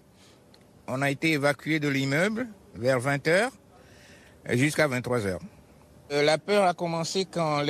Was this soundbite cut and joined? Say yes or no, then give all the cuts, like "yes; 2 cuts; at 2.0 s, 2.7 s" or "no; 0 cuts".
no; 0 cuts